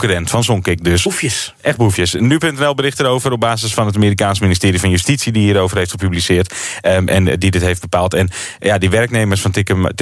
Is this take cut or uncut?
uncut